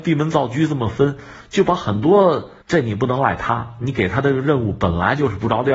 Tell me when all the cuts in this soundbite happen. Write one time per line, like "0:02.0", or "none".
0:02.6